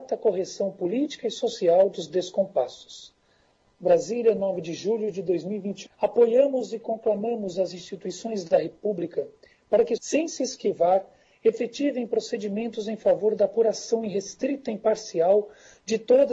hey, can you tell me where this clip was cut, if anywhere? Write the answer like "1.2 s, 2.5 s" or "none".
5.9 s, 10.0 s